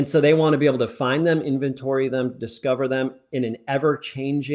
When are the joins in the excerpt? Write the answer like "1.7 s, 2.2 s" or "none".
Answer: none